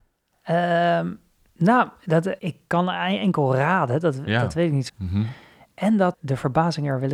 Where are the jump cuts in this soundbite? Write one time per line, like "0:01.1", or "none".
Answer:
0:02.4
0:04.9
0:06.1